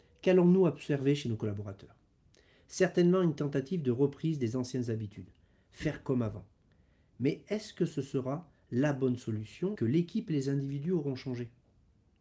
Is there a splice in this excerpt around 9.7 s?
yes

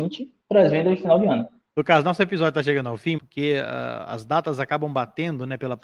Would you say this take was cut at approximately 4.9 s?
no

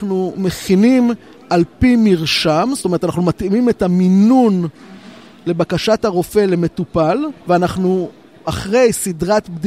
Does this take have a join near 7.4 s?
yes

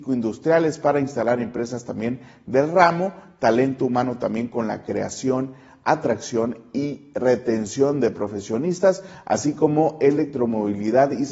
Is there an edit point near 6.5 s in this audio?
no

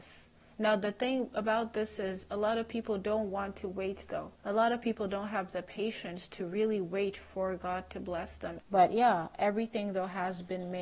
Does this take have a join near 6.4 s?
no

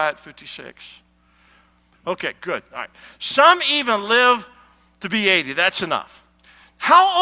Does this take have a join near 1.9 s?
yes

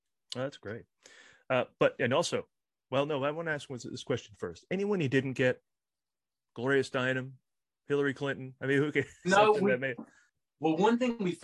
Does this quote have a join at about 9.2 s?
yes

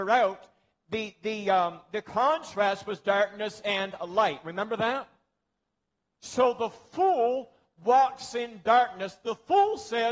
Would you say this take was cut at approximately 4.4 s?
no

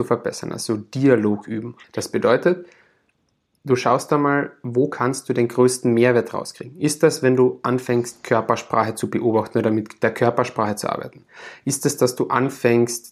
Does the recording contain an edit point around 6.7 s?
no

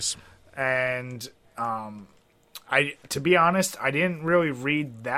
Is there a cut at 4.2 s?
no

